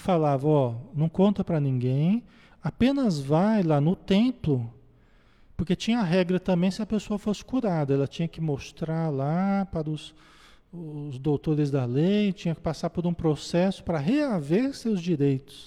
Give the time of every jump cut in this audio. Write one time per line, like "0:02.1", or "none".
none